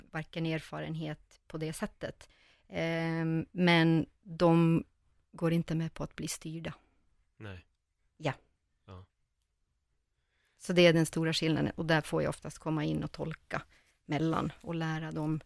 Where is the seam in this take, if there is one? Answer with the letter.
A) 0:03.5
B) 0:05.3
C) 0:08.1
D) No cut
C